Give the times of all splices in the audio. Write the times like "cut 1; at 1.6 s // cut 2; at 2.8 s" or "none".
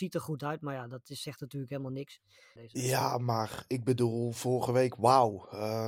cut 1; at 2.6 s